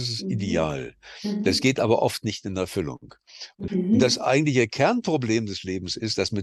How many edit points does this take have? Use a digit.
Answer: 1